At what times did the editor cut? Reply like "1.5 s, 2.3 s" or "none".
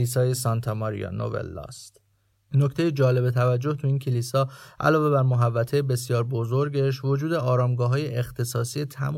2.3 s